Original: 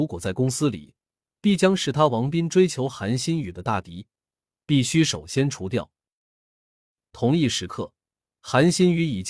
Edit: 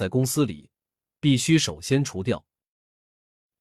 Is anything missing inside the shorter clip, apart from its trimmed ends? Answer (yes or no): yes